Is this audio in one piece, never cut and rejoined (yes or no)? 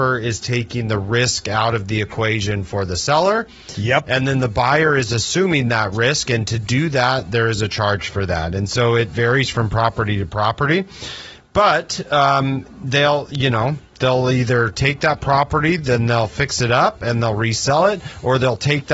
yes